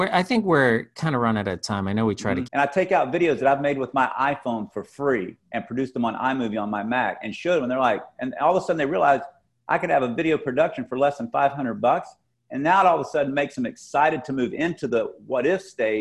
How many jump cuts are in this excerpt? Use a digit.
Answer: 1